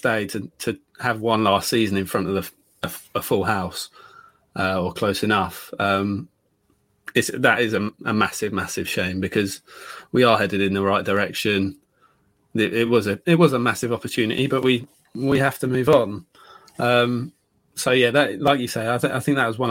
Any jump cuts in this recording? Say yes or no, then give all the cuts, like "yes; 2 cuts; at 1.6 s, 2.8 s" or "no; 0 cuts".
no; 0 cuts